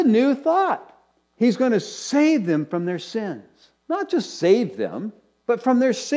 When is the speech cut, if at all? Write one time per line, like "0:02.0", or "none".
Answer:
0:03.8